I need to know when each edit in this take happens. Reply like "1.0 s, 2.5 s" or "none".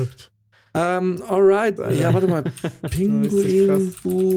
1.8 s